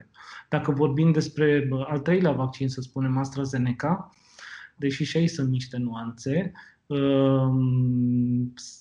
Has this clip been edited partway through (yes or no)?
yes